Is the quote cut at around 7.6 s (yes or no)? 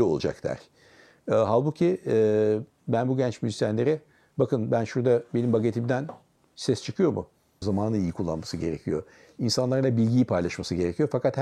yes